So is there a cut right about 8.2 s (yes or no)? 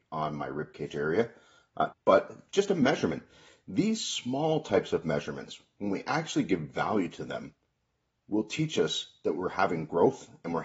no